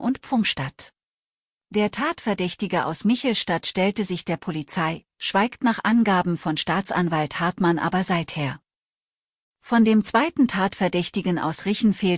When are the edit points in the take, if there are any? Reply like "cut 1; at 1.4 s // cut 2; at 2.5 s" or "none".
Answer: cut 1; at 1.5 s